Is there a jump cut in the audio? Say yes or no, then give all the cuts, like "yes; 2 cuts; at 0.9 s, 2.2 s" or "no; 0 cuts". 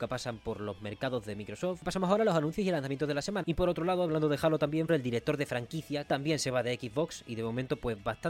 yes; 2 cuts; at 3.4 s, 4.9 s